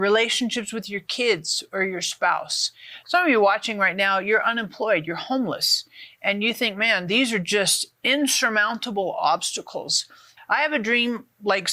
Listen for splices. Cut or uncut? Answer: cut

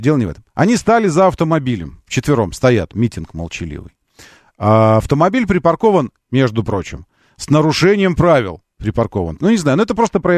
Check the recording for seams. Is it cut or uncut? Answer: cut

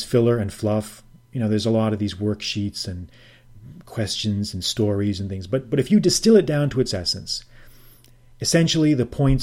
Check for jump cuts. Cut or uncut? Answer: uncut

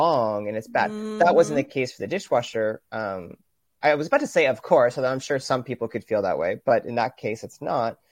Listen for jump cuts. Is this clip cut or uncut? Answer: uncut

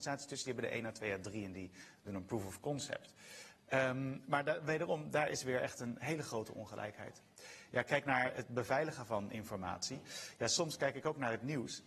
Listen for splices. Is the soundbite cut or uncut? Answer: uncut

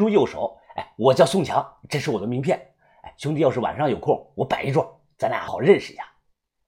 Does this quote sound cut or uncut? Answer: cut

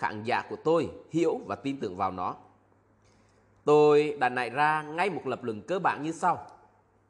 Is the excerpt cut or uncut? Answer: uncut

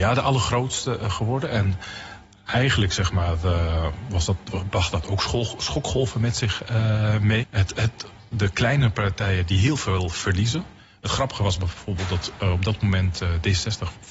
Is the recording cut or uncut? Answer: cut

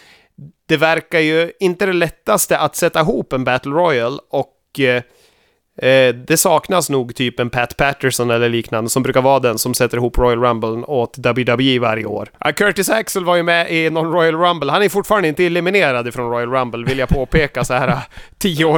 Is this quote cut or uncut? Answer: cut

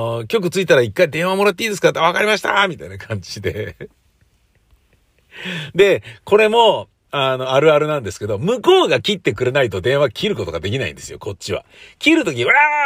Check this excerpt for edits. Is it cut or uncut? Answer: uncut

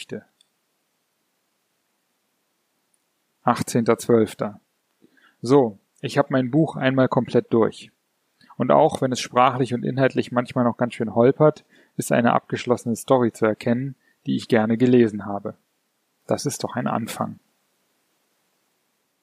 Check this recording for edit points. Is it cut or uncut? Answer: cut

